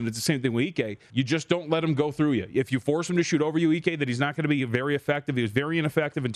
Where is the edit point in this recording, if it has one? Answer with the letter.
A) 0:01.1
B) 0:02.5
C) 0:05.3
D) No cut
A